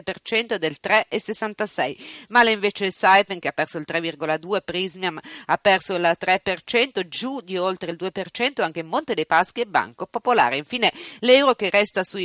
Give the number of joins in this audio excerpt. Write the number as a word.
zero